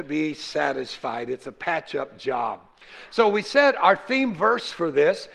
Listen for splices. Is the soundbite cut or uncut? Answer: uncut